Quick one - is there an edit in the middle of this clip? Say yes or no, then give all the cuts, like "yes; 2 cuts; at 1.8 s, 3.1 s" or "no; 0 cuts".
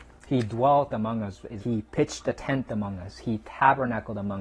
yes; 1 cut; at 1.6 s